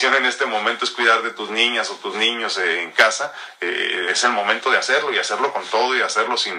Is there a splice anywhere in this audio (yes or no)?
no